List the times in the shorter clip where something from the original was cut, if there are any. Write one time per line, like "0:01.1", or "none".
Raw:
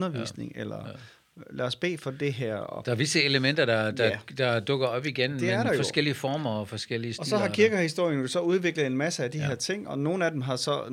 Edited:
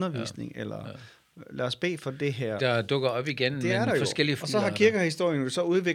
0:02.6
0:04.4